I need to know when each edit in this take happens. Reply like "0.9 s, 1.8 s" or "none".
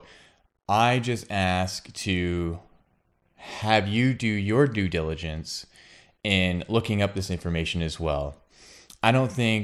none